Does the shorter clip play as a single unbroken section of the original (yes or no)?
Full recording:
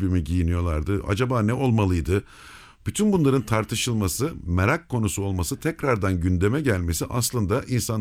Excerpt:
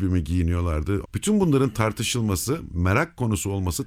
no